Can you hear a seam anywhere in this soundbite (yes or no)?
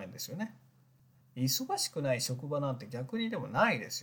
yes